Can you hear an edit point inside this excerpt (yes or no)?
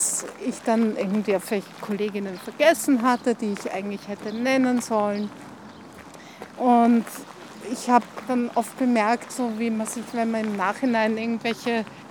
yes